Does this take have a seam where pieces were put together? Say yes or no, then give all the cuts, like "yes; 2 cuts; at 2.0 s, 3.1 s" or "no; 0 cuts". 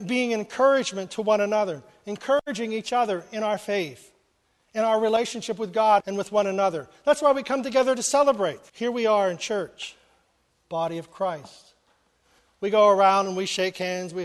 yes; 2 cuts; at 6.0 s, 8.7 s